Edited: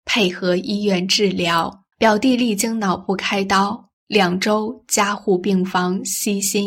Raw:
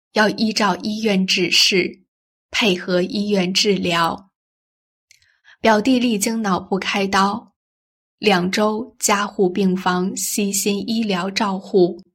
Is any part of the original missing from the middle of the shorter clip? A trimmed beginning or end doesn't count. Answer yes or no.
yes